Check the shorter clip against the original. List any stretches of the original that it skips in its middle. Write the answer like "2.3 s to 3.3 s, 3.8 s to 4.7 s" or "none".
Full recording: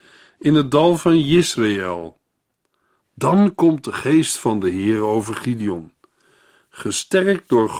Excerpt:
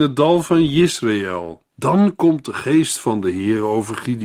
2.2 s to 3.1 s